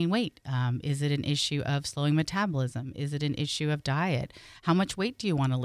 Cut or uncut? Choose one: uncut